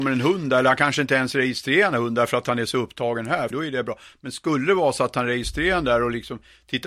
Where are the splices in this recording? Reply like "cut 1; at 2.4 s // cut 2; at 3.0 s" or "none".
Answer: cut 1; at 3.5 s